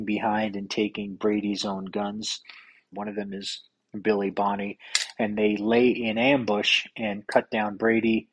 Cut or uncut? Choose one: cut